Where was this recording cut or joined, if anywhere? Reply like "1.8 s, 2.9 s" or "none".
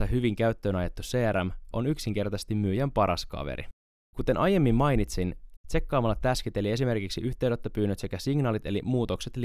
1.7 s, 4.0 s, 5.6 s